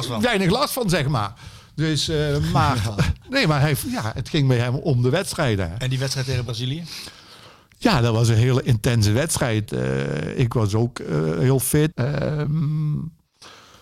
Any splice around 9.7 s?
yes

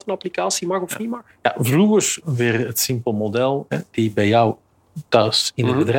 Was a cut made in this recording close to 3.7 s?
yes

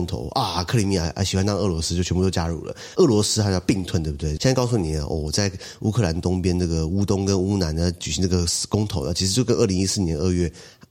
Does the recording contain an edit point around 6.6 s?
no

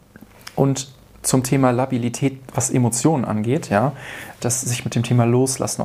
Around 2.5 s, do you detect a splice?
no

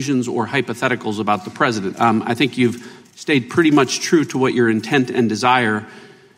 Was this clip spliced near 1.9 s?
yes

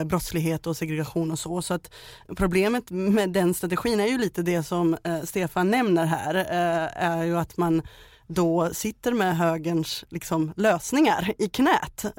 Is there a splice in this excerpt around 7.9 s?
no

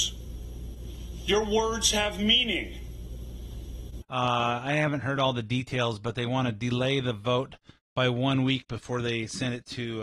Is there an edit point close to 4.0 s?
yes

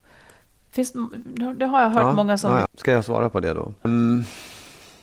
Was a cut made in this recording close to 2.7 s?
yes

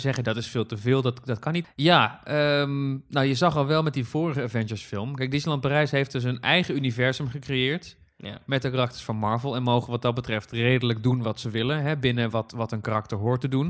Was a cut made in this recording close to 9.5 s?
no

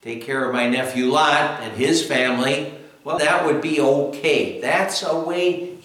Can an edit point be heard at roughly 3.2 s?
yes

